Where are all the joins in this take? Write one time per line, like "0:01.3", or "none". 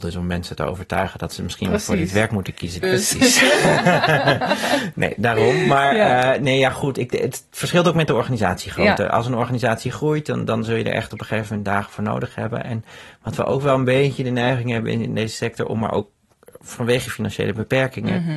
0:02.8